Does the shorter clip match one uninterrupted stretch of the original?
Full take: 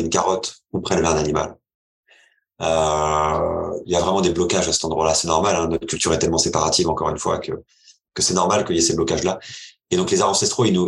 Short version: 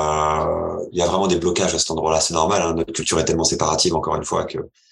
yes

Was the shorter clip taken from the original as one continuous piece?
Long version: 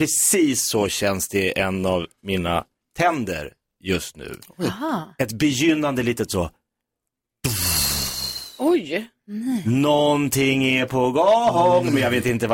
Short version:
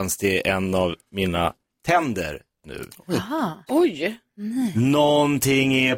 no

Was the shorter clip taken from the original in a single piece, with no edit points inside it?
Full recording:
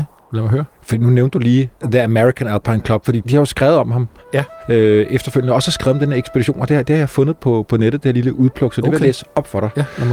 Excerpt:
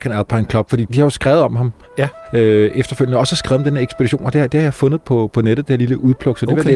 yes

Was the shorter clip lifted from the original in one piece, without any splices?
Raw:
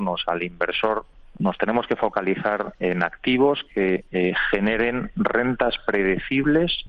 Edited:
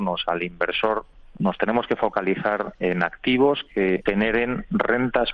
no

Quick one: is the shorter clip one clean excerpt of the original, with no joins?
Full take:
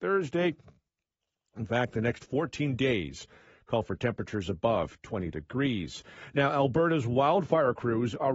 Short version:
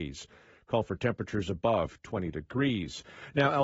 yes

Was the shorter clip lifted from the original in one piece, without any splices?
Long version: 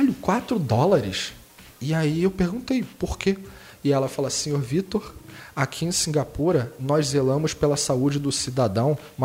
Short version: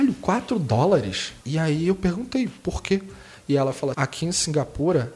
no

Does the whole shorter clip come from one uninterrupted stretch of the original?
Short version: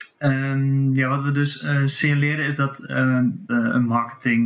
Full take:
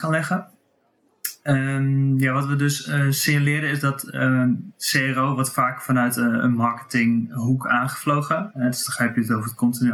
no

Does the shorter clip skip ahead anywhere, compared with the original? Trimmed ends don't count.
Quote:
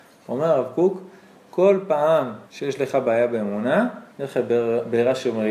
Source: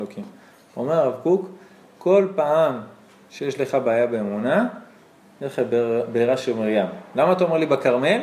yes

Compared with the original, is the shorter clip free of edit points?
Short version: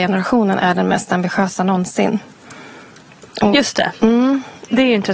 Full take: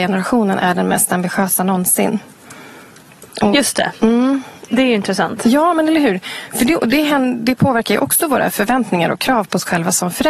yes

